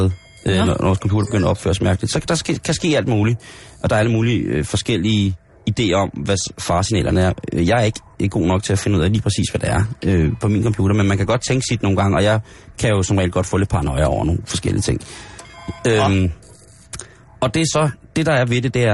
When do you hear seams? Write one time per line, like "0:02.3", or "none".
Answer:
none